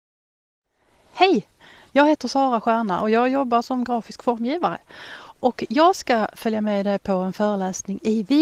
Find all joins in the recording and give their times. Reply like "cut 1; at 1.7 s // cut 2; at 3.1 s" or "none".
none